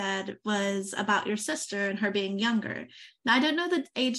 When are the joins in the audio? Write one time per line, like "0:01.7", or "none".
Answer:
none